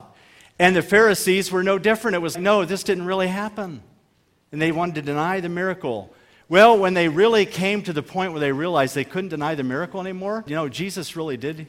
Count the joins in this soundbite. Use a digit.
2